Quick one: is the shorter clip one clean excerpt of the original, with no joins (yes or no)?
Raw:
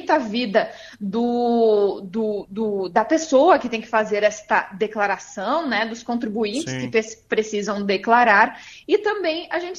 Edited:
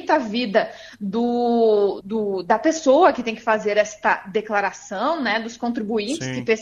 no